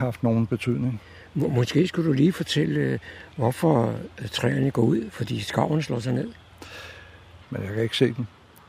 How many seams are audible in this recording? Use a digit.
1